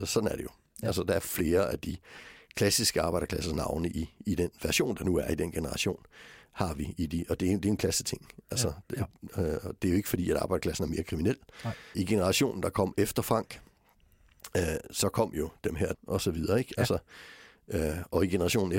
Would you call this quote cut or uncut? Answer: cut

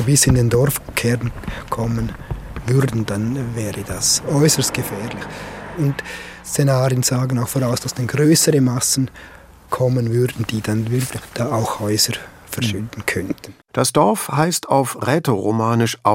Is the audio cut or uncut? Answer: cut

